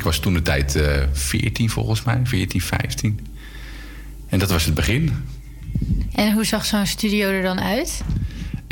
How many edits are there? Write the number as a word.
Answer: zero